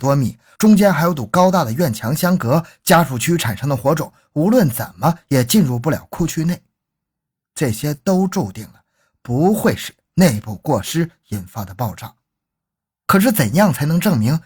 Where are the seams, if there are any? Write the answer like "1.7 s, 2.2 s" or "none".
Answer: none